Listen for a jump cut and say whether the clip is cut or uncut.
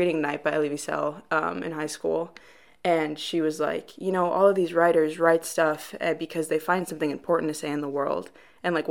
uncut